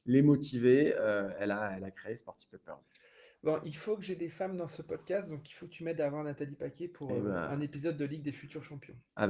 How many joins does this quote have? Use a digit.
0